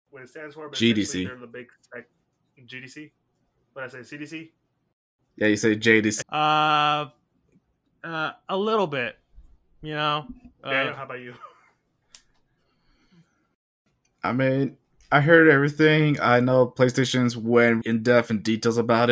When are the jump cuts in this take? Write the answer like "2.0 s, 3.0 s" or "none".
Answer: 6.2 s, 17.8 s